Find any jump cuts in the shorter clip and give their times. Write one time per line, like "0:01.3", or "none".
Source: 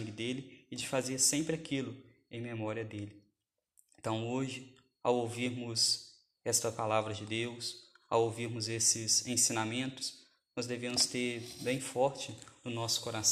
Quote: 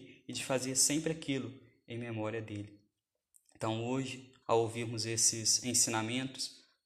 0:04.4